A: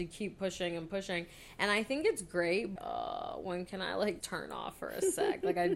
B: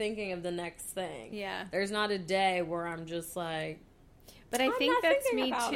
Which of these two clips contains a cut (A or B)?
A